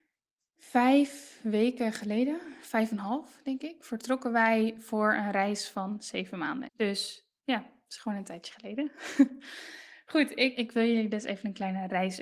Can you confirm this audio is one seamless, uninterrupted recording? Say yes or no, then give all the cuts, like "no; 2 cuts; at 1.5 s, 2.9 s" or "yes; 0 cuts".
no; 2 cuts; at 6.7 s, 10.5 s